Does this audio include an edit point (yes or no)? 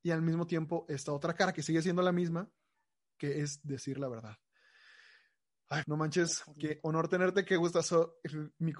yes